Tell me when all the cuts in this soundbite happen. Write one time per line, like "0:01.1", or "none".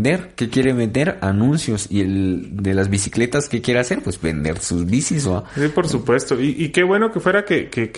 none